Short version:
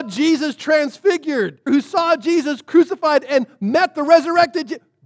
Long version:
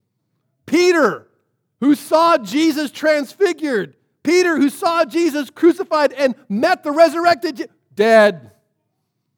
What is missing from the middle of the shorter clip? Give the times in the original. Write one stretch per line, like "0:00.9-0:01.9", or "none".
0:04.0-0:04.5